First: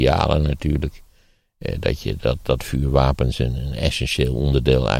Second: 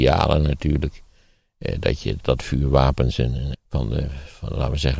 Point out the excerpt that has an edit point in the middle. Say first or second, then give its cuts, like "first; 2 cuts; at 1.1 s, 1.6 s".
second; 2 cuts; at 2.2 s, 3.5 s